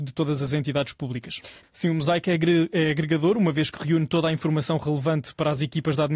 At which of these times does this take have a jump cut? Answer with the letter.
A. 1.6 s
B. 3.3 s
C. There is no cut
A